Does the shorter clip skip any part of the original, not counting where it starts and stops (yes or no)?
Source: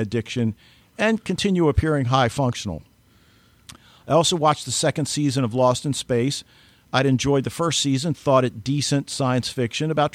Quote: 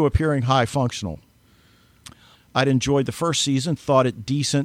yes